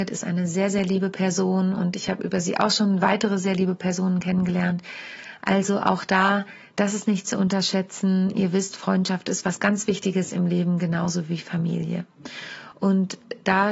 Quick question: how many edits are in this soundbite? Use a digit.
1